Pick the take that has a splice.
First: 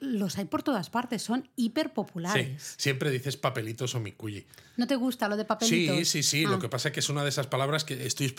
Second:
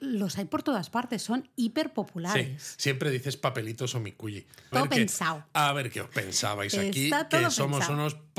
second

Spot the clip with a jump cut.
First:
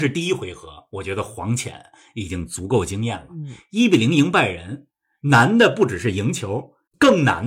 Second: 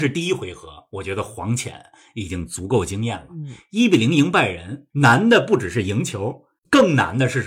second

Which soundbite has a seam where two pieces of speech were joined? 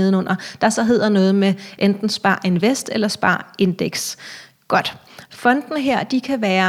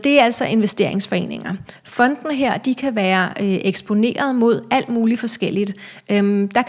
first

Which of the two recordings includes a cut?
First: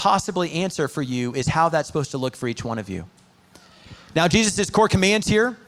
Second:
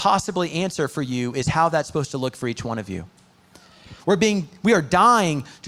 second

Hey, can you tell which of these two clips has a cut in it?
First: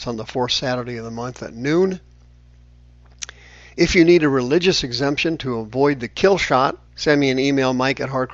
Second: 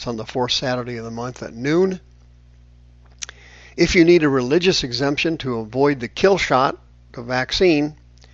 first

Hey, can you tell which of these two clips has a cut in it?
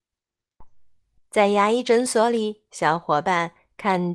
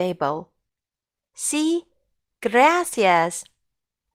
first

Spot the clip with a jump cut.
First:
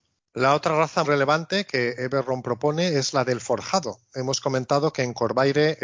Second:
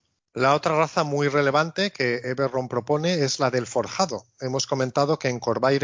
first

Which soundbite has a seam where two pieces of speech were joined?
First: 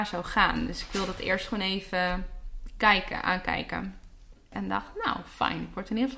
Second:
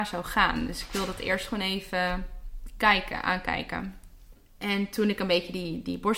first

